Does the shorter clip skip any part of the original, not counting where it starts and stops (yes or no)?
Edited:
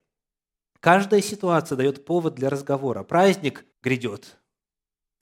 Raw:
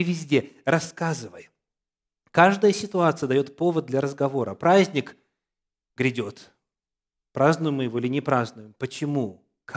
yes